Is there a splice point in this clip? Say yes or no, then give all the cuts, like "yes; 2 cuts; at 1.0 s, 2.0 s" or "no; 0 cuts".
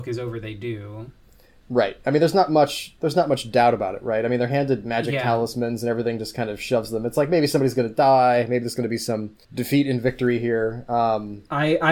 no; 0 cuts